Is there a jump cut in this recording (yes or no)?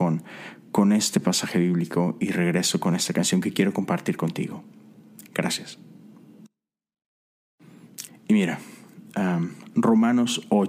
yes